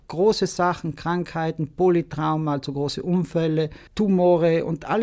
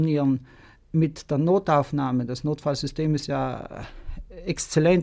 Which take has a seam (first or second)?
first